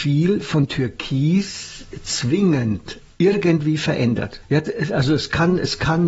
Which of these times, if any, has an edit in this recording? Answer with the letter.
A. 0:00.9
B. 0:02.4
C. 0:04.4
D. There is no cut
C